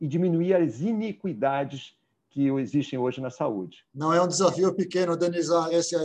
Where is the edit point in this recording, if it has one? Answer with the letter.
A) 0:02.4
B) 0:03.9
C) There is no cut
C